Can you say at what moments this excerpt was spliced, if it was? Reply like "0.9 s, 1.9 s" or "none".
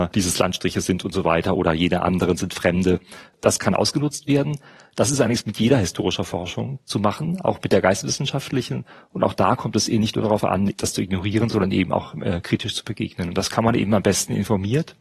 none